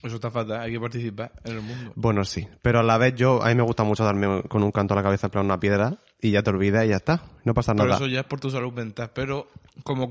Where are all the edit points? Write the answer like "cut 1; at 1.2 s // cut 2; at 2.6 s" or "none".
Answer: none